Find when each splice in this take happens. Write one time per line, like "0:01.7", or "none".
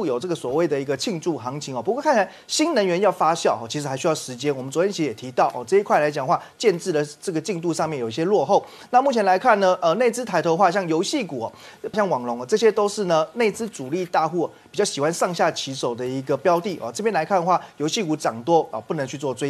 0:11.9

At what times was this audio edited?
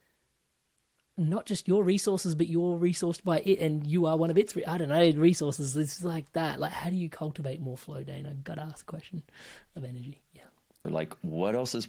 0:10.8

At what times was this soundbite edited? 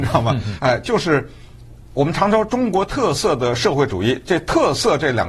none

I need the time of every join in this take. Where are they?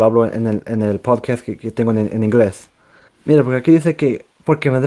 0:03.1

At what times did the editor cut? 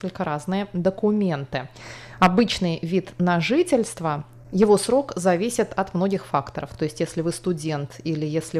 none

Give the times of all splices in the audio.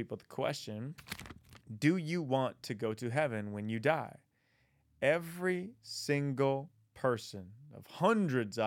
none

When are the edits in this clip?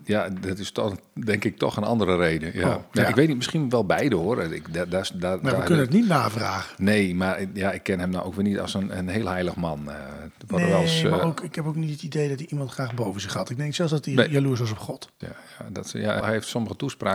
0:15.2
0:16.2

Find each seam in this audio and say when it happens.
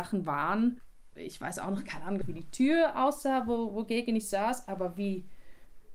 0:01.1
0:02.2

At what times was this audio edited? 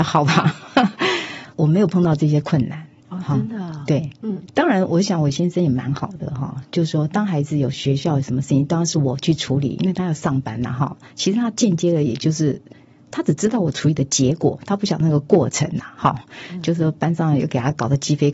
none

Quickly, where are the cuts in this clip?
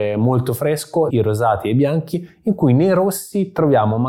0:01.1

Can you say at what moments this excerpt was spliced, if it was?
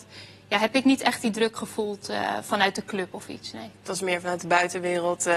none

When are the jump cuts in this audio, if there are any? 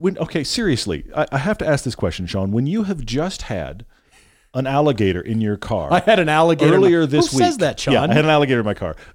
none

